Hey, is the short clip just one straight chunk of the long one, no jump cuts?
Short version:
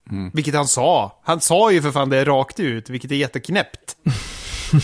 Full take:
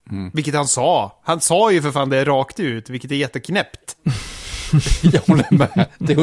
yes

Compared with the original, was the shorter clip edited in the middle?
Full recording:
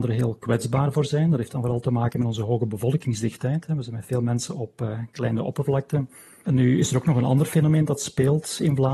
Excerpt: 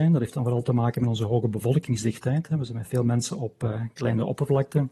no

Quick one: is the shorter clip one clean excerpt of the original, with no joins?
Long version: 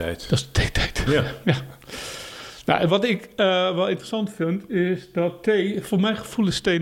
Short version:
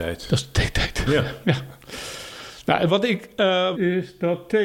no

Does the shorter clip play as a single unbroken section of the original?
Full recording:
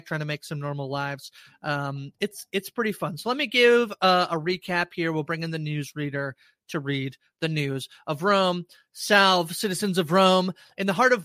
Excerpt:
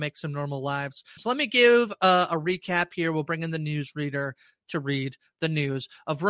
no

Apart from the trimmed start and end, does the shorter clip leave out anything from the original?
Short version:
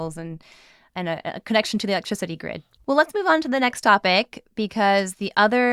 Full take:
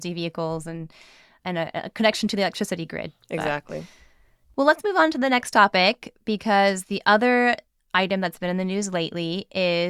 yes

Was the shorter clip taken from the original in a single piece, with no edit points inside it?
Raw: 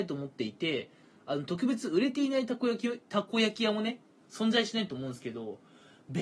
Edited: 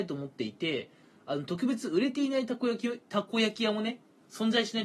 yes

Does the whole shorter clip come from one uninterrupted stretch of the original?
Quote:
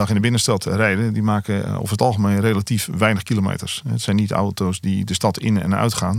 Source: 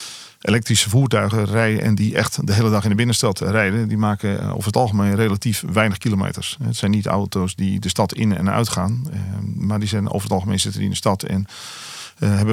yes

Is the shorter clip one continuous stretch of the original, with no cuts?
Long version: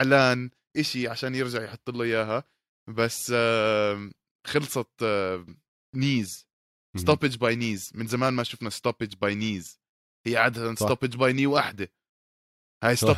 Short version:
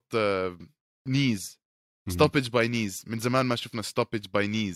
yes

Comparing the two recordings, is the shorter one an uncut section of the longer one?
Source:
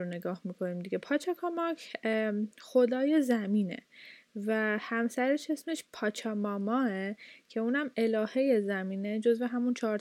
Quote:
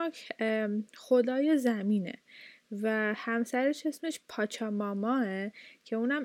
yes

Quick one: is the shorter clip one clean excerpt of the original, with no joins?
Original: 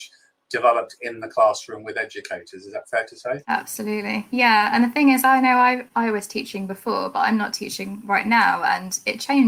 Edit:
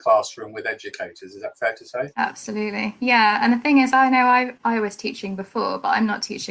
yes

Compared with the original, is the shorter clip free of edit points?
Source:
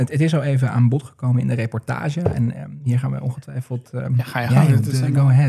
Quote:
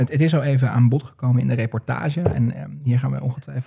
yes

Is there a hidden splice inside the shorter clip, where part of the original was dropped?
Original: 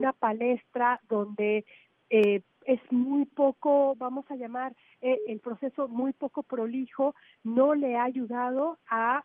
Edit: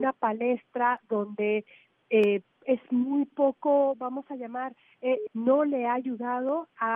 yes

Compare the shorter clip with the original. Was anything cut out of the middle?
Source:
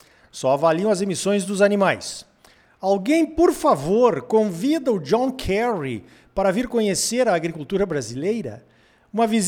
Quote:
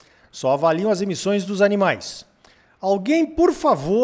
no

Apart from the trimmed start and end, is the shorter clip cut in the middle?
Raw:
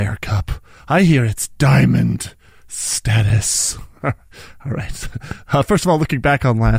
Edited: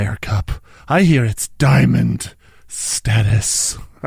no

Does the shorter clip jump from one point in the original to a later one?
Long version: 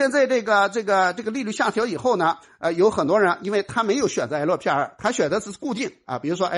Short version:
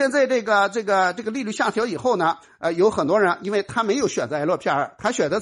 no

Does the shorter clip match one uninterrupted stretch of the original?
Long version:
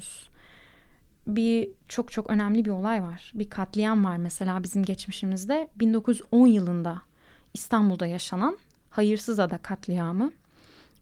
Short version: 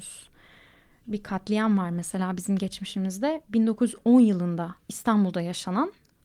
no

